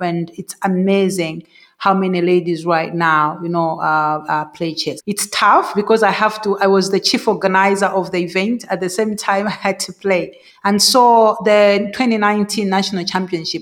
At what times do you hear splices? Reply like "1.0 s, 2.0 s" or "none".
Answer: 5.0 s, 10.5 s